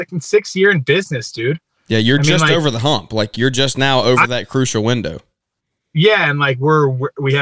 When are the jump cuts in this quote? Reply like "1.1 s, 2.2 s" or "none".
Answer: none